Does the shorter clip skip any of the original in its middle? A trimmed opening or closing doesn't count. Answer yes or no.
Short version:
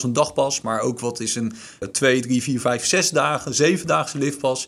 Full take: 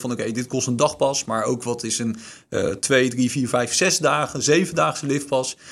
yes